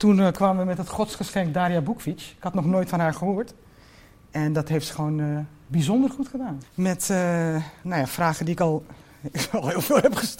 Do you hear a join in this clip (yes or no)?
yes